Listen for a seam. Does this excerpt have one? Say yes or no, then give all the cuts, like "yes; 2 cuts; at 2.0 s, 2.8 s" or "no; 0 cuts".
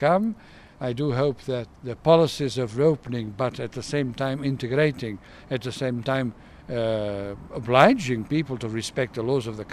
yes; 1 cut; at 1.7 s